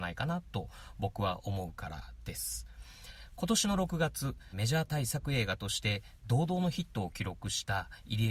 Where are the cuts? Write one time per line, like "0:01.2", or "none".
0:04.5